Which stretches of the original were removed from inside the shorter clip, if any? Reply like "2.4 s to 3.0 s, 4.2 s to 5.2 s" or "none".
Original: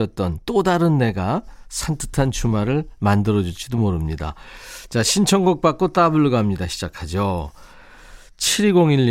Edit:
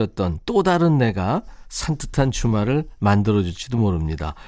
none

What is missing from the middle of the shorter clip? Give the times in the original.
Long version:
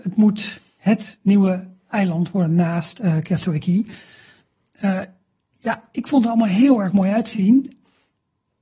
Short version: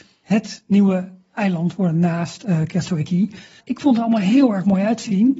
4.1 s to 5.9 s

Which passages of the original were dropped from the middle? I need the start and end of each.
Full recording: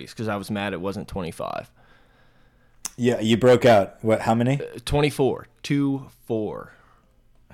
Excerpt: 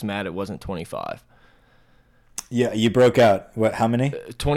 none

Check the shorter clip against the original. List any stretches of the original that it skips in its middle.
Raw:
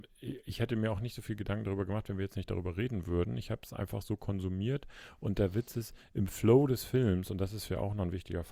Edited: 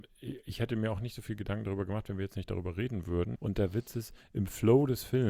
3.4 s to 5.2 s

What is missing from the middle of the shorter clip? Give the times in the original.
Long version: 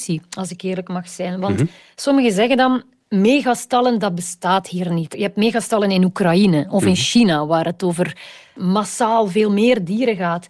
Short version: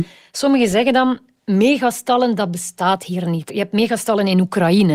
none

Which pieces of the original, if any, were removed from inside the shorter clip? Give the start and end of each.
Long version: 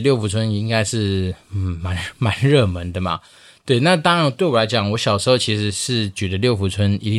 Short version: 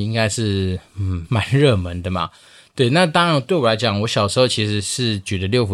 1.8 s to 2.1 s

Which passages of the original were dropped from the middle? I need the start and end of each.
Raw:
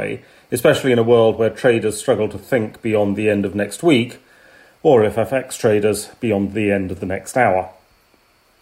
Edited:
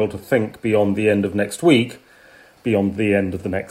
4.8 s to 6.1 s

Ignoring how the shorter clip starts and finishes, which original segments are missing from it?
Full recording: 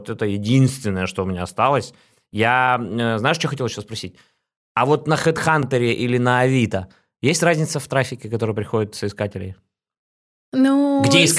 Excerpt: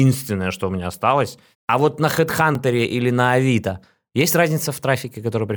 2.1 s to 4.6 s

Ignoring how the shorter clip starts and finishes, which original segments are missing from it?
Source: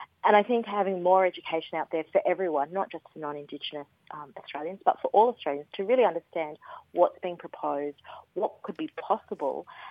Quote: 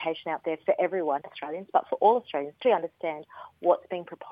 2.7 s to 4.3 s, 5.8 s to 6.0 s

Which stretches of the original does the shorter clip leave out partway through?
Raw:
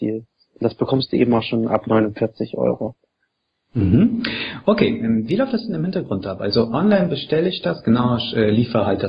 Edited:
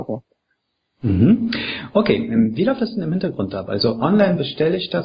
none

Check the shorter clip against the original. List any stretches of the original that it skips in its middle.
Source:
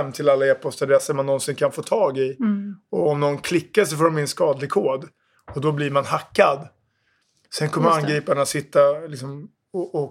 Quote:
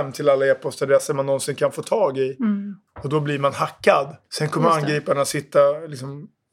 2.9 s to 5.4 s, 6.8 s to 7.4 s

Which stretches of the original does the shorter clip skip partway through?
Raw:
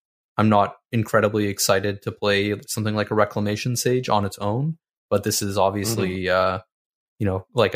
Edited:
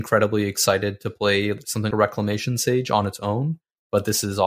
2.9 s to 3.1 s

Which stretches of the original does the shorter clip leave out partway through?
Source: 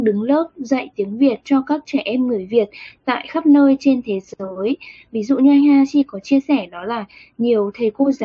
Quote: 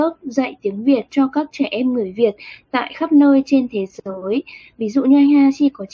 none

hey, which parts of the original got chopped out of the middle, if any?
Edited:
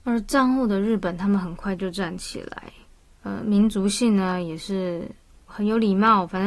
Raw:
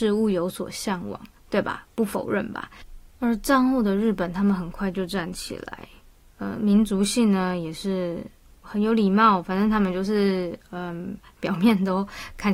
none

